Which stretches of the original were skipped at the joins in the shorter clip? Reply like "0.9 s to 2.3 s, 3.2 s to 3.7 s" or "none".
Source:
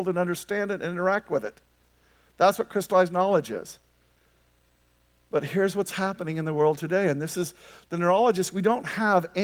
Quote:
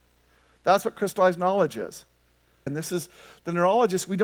4.4 s to 7.1 s